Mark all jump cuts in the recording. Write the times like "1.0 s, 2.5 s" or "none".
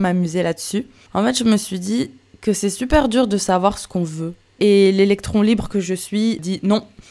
1.1 s, 4.6 s